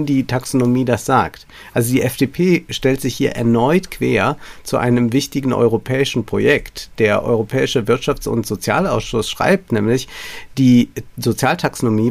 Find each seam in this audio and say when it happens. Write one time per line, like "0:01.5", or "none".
none